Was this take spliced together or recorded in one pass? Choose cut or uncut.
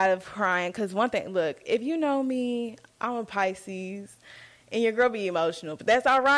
uncut